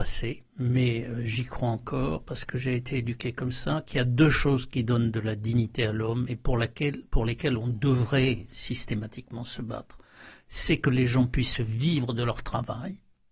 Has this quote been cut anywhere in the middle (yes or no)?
no